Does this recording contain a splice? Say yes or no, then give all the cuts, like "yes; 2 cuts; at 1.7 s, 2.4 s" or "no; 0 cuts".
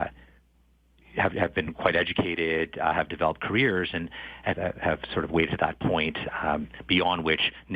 yes; 1 cut; at 4.5 s